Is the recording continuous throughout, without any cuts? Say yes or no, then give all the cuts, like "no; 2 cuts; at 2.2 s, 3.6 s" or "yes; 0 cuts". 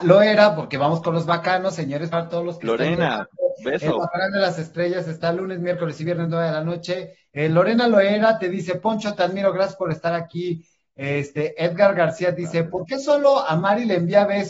no; 2 cuts; at 2.1 s, 7.2 s